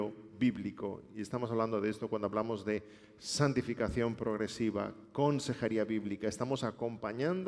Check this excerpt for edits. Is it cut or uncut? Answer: uncut